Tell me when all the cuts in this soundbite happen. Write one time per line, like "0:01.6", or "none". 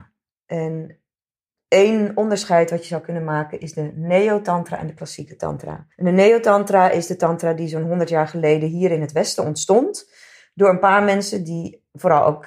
0:05.9

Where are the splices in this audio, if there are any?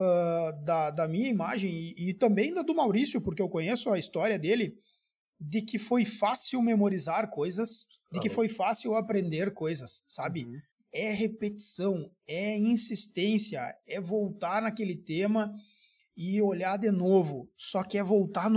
0:10.7

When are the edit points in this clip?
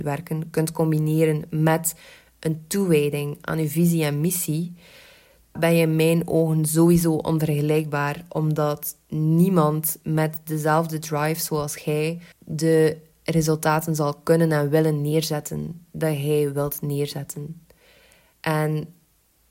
0:05.6
0:12.3
0:18.3

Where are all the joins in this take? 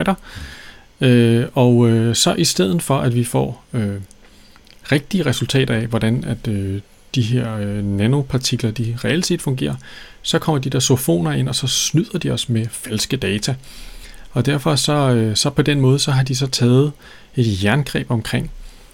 none

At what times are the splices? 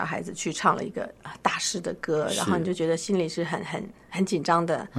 none

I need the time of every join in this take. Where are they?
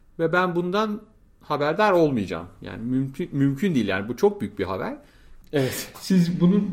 0:05.4

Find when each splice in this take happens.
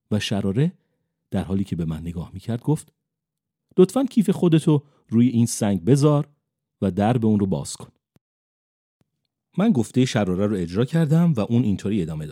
none

